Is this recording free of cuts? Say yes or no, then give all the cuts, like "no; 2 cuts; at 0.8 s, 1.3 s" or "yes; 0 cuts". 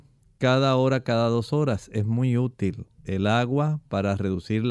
yes; 0 cuts